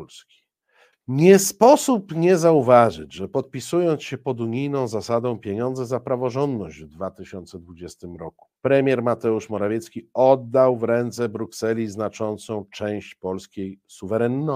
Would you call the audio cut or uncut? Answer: cut